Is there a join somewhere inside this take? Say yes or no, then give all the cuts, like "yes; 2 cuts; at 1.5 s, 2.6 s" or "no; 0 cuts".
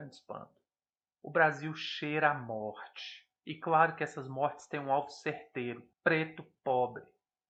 yes; 2 cuts; at 3.4 s, 5.9 s